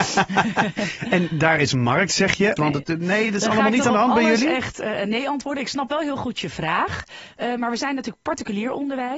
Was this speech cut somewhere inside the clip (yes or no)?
yes